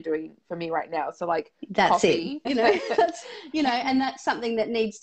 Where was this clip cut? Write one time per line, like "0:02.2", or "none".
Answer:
0:02.5